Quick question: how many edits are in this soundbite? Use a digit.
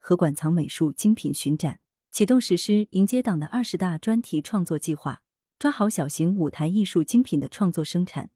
1